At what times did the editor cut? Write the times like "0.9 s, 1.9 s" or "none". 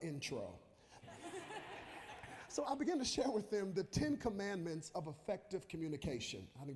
1.0 s, 2.6 s